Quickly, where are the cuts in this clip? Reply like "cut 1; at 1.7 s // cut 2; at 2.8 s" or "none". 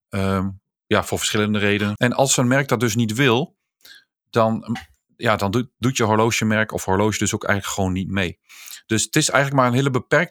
cut 1; at 2.0 s